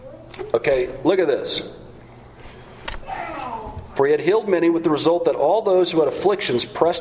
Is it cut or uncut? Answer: cut